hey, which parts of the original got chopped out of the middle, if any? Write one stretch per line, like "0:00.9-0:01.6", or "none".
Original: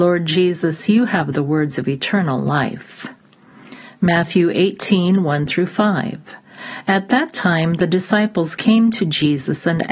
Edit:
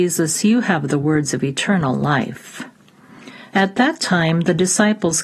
0:03.9-0:06.8